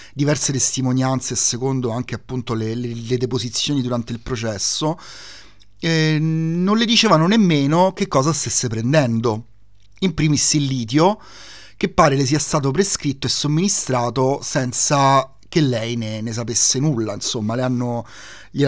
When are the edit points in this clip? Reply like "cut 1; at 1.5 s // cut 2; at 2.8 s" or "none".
none